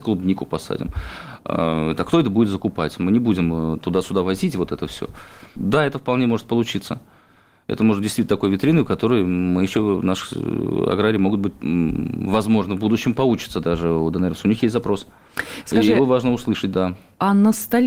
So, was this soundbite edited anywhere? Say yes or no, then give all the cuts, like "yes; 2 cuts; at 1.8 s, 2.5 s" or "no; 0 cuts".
yes; 1 cut; at 5.6 s